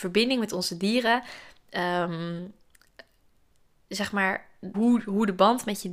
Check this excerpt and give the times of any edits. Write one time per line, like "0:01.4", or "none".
0:04.7

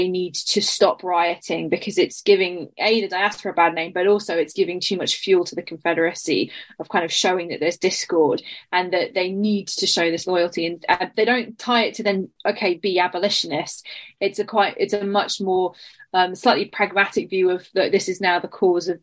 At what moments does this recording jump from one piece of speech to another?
none

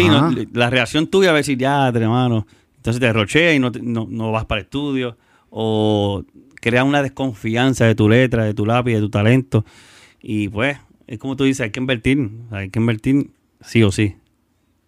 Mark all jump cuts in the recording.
none

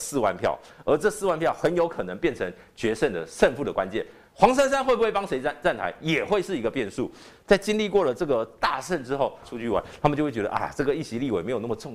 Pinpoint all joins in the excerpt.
0:07.4
0:09.4

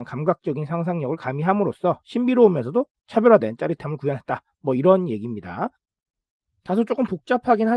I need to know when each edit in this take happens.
none

